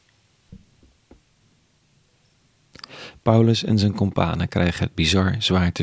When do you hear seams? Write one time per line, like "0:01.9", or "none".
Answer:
none

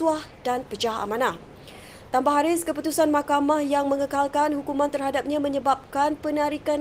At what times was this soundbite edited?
none

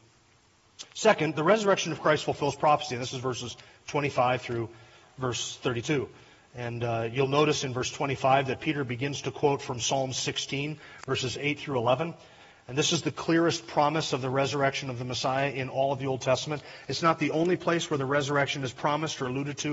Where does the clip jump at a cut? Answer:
none

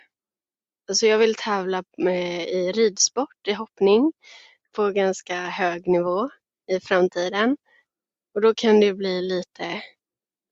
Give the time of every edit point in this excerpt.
none

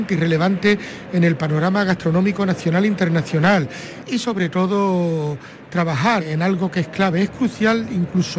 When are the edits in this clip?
0:06.2

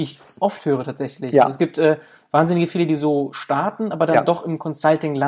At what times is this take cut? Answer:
none

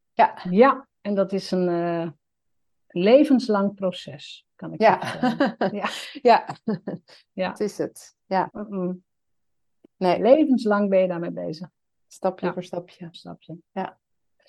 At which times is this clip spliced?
0:08.5
0:13.1

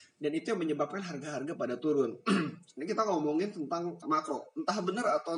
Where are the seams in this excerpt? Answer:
0:04.0

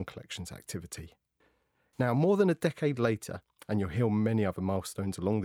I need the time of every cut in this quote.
0:01.9

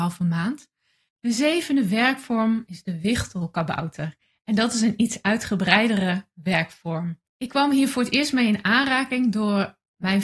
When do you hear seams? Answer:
0:01.1
0:07.3

